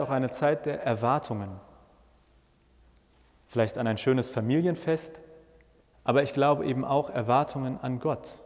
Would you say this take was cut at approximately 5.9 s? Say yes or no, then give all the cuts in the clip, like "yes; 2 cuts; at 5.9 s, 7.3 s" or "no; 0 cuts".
yes; 1 cut; at 5.9 s